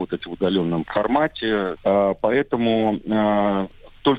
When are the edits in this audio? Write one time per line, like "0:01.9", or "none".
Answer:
0:01.8